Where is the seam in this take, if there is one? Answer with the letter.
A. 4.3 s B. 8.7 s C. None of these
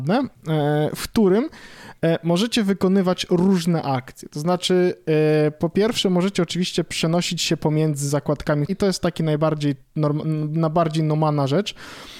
B